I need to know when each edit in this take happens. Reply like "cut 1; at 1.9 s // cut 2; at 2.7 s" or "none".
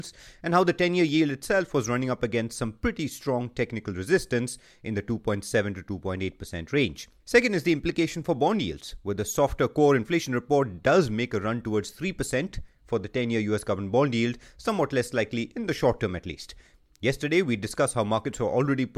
cut 1; at 7.2 s